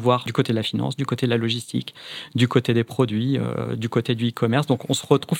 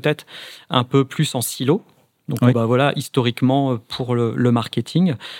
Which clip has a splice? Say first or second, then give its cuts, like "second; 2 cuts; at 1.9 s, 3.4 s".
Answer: second; 1 cut; at 2.5 s